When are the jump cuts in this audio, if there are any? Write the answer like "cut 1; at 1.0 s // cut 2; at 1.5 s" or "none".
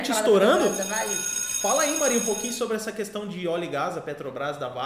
none